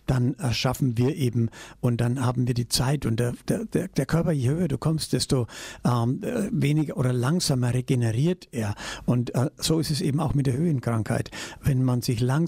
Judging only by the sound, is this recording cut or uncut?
uncut